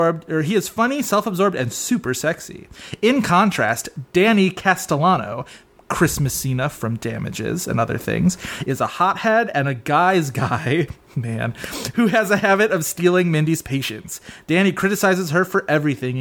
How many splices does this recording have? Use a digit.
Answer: 0